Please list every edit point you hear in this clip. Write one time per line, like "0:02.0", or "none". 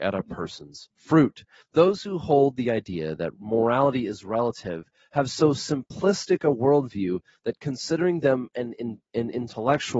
0:01.6